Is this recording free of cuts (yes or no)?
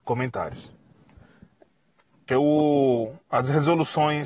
no